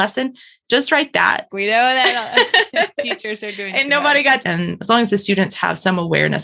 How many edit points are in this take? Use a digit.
2